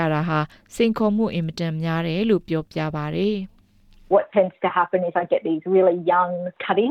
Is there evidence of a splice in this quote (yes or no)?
no